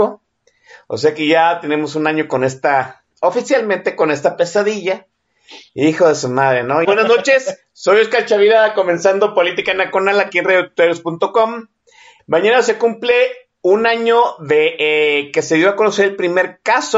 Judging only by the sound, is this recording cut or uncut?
cut